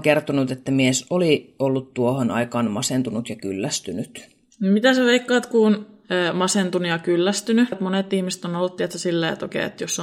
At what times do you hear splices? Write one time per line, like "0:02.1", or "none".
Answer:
0:07.7